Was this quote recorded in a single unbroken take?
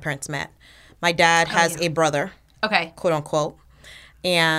yes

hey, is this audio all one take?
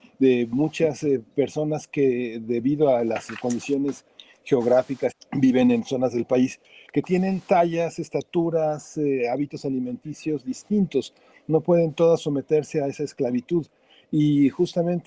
no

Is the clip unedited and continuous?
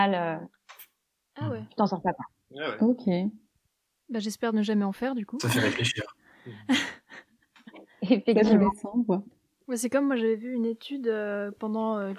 yes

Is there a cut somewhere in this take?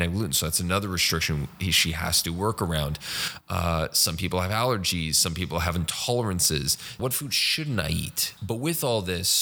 yes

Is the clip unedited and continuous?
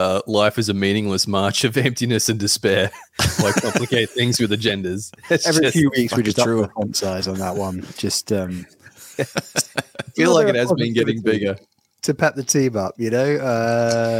yes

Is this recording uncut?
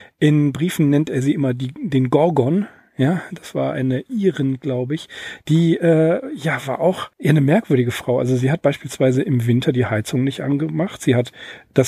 no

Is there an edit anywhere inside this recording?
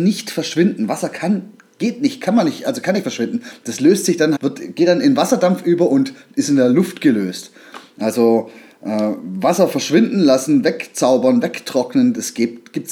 yes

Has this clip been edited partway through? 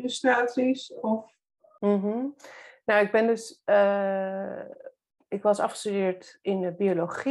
no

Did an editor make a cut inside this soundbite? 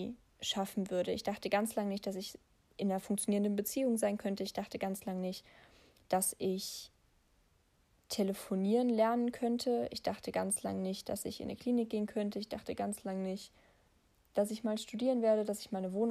no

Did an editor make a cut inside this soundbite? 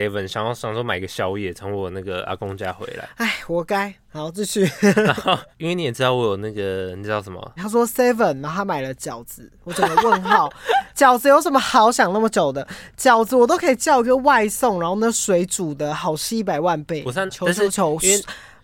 yes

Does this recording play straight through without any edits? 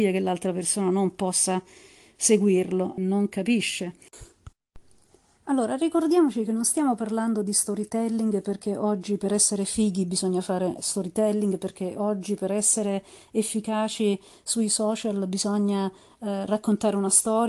no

